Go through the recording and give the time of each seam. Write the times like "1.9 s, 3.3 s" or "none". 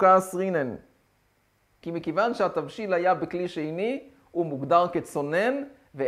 1.8 s